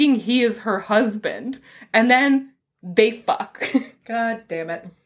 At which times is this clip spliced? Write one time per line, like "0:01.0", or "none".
none